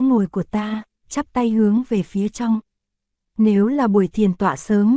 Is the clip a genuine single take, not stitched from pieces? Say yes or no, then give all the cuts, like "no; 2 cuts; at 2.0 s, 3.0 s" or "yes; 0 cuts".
no; 2 cuts; at 0.9 s, 3.2 s